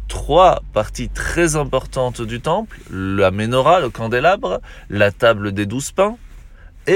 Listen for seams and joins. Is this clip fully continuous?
yes; 0 cuts

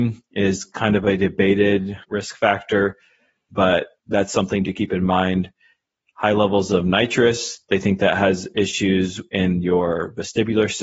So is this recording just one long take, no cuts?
yes; 0 cuts

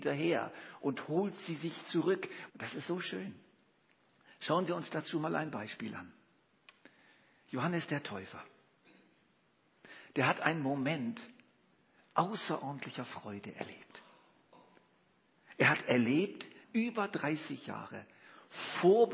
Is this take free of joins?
no; 2 cuts; at 2.5 s, 16.6 s

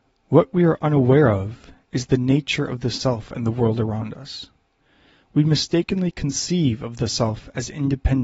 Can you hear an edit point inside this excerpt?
no; 0 cuts

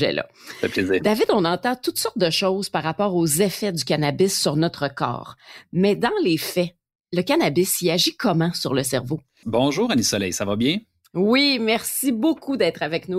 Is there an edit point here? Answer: yes; 1 cut; at 9.4 s

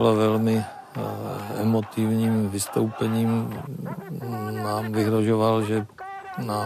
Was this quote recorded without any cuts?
yes; 0 cuts

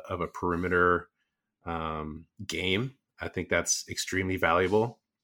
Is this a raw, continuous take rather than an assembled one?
yes; 0 cuts

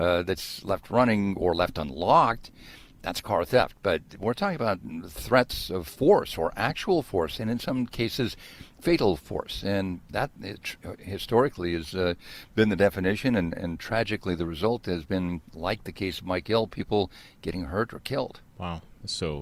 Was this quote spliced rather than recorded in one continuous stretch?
no; 0 cuts

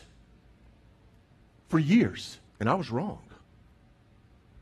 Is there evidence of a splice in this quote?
yes; 1 cut; at 2.5 s

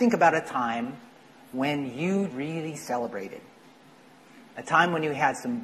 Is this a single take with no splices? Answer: no; 1 cut; at 2.3 s

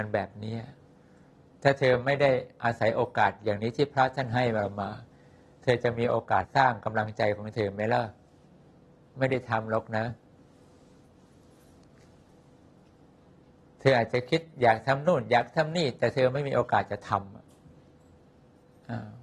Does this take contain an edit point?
yes; 1 cut; at 6.4 s

